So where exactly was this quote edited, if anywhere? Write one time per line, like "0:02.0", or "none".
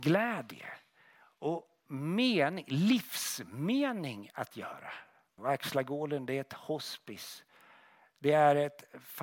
0:05.4